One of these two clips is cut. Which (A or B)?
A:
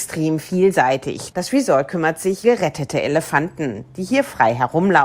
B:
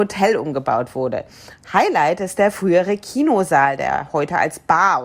A